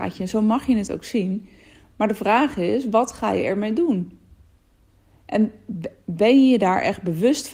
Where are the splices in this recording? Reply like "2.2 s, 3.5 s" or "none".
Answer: none